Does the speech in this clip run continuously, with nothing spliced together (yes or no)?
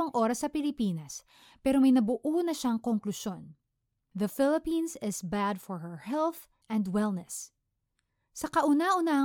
no